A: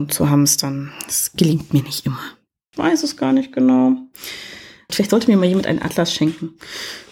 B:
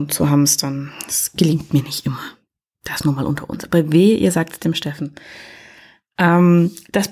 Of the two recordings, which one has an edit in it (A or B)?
A